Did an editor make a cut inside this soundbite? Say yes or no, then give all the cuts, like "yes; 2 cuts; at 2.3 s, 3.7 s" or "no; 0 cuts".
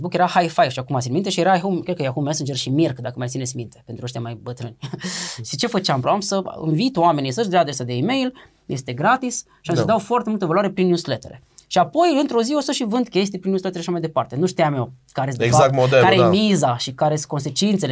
yes; 1 cut; at 6.0 s